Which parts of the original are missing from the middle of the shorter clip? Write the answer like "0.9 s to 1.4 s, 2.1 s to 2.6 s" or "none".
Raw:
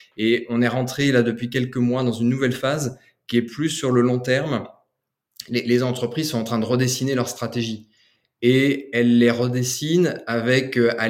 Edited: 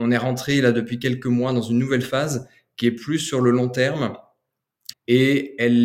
5.4 s to 8.3 s